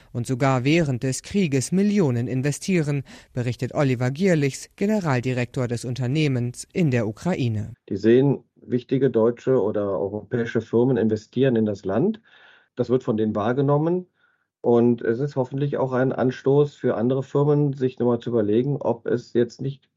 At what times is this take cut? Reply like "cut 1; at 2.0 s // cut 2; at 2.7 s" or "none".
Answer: cut 1; at 7.7 s